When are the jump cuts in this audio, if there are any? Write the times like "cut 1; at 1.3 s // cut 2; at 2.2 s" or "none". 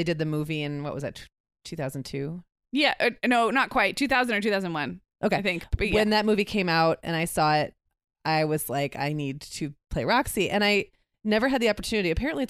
none

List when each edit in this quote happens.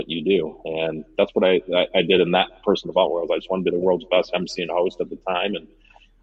none

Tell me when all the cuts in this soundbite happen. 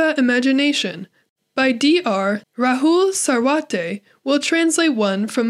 cut 1; at 2.4 s

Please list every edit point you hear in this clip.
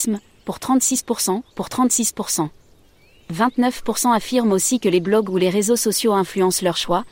cut 1; at 1.5 s

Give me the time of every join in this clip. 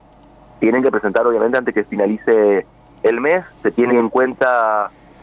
cut 1; at 3.9 s

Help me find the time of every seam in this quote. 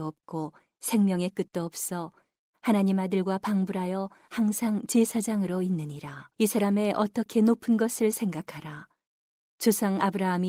cut 1; at 6.3 s

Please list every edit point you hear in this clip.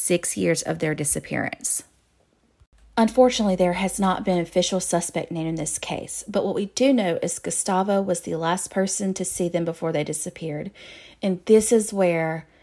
none

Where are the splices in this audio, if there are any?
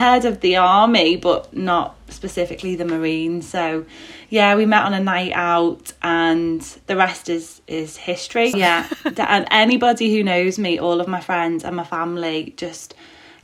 cut 1; at 8.5 s

